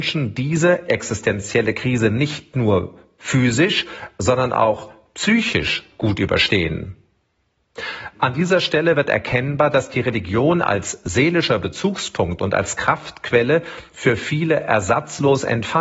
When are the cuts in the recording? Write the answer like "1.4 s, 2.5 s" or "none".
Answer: 8.1 s